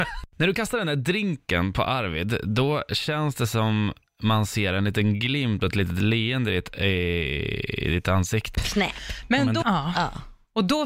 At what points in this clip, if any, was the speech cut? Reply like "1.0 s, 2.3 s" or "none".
8.5 s, 9.6 s